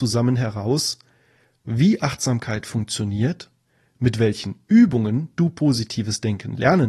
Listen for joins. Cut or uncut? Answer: uncut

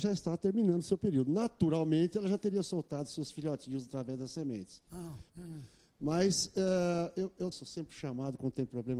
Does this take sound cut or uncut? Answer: cut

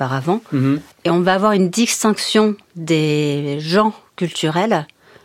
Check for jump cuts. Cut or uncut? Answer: cut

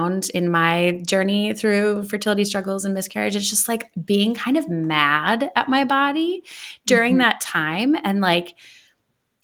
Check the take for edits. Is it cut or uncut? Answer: uncut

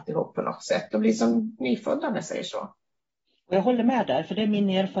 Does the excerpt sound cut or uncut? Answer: uncut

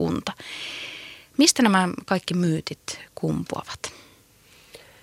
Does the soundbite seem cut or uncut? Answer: uncut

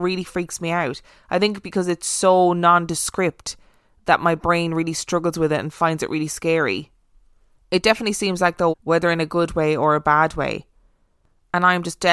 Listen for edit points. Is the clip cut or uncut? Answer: cut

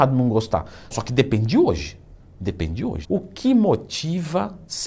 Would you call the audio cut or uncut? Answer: cut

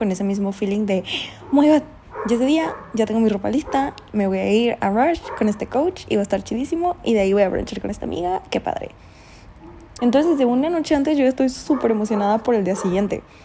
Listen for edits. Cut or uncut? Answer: cut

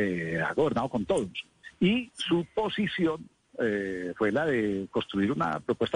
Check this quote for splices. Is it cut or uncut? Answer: uncut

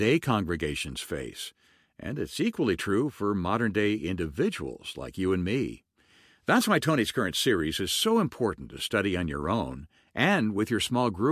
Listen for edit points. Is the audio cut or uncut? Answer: uncut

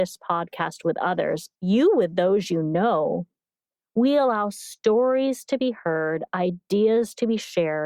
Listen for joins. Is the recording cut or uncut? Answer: cut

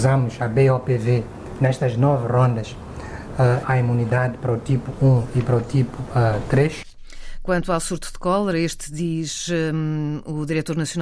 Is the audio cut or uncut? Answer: cut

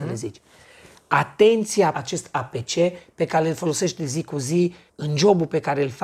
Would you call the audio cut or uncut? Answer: cut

